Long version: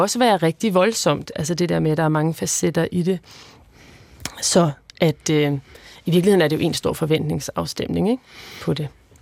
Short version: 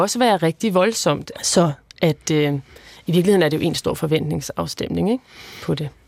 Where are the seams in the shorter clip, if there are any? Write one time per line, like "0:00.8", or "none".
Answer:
0:01.3